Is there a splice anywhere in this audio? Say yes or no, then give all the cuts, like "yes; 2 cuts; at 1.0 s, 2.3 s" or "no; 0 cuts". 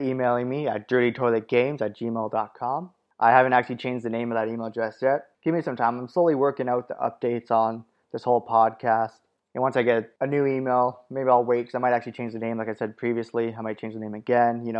no; 0 cuts